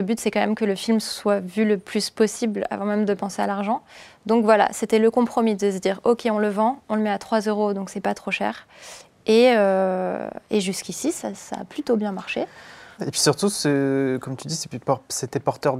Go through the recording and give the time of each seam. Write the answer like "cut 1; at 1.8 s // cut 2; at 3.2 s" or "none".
cut 1; at 13.0 s